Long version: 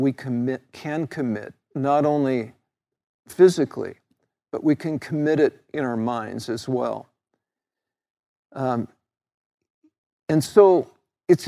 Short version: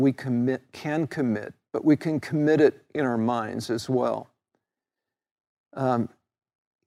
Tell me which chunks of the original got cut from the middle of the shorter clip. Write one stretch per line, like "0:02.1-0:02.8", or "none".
0:01.6-0:04.4